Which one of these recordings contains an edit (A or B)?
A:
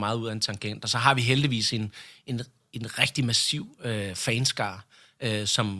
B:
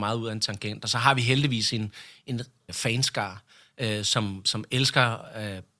B